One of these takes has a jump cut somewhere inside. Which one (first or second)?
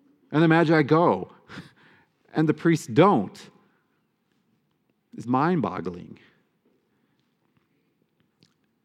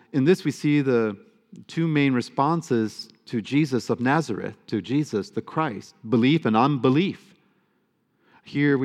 first